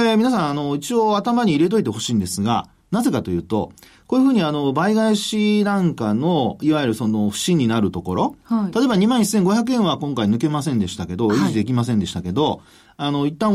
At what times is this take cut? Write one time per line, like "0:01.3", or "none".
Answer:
none